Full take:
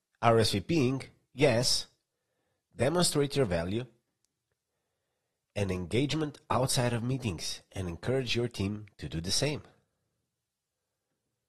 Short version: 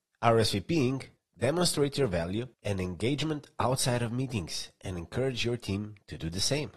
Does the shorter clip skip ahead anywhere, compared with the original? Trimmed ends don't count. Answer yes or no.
yes